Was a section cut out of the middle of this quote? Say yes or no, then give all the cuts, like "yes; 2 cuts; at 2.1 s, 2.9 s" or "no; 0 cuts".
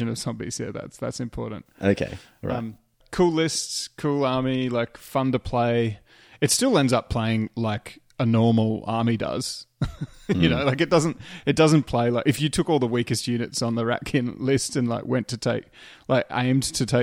no; 0 cuts